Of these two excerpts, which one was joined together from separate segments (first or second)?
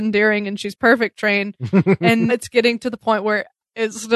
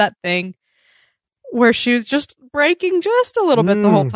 first